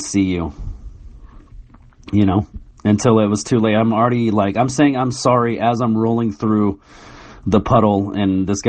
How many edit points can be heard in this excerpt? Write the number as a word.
zero